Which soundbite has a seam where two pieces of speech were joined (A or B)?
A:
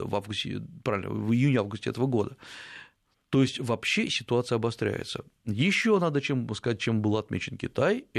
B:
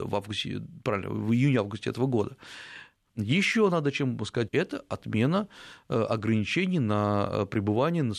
B